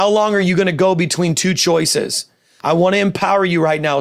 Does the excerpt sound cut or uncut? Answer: cut